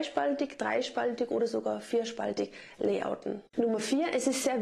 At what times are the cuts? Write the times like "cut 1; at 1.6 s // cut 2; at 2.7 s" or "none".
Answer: cut 1; at 3.5 s